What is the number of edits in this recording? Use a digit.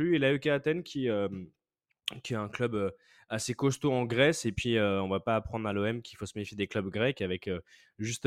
0